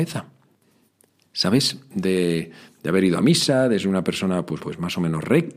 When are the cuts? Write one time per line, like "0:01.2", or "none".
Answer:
0:01.9
0:04.6